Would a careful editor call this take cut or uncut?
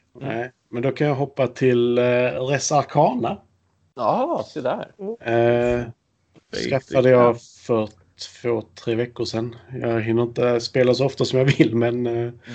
uncut